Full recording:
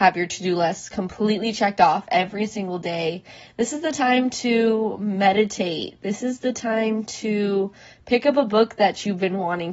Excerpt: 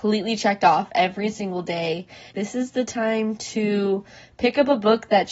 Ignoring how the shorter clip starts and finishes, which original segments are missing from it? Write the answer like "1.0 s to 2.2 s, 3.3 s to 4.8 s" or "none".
3.5 s to 6.0 s